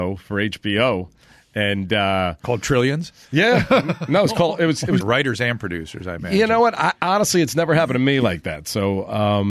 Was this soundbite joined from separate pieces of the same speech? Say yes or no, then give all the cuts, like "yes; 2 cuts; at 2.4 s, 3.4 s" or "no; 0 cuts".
yes; 1 cut; at 5.0 s